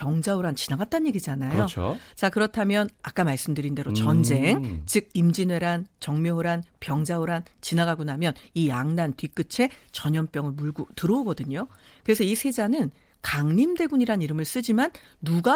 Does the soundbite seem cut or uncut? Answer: uncut